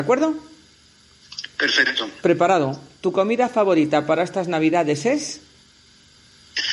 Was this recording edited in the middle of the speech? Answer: no; 0 cuts

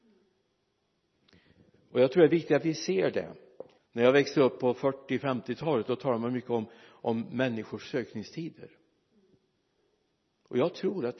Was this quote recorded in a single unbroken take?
no; 1 cut; at 3.8 s

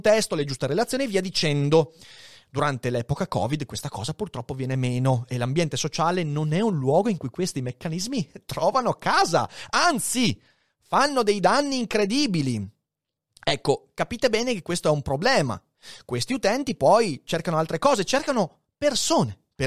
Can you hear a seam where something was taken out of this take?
no; 0 cuts

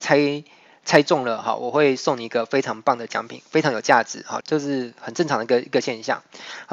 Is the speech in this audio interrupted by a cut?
yes; 1 cut; at 4.4 s

